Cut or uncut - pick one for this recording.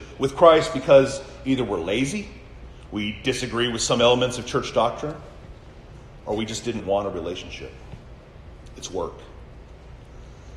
cut